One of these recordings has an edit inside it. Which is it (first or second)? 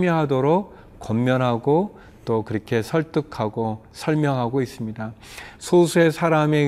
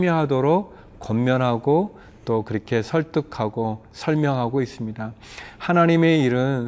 first